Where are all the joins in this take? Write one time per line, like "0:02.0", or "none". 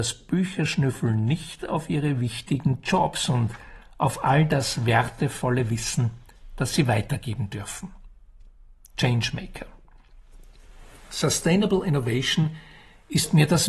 none